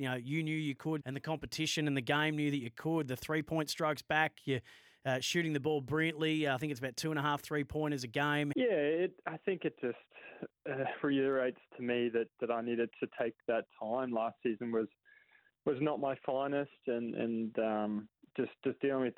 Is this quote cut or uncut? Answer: cut